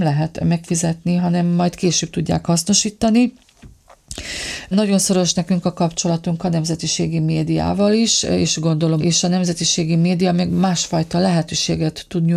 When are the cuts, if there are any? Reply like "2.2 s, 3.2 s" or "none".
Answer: 4.7 s, 9.0 s